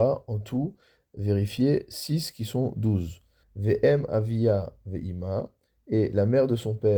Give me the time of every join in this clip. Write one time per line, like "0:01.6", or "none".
0:03.4